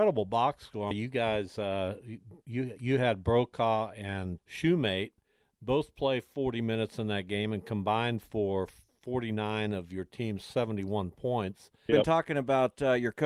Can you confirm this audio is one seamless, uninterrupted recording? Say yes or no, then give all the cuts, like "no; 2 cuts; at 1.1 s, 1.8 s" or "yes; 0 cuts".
no; 3 cuts; at 0.9 s, 4.4 s, 11.9 s